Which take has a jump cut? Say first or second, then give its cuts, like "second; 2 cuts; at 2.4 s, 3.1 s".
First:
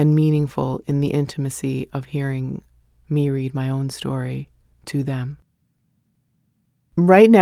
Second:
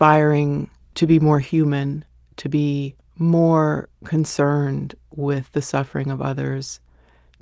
second; 1 cut; at 2.2 s